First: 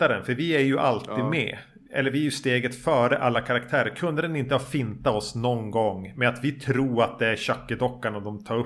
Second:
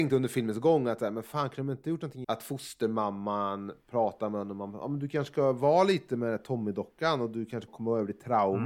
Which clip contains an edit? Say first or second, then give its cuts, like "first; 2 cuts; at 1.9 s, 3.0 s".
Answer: second; 2 cuts; at 2.2 s, 7.7 s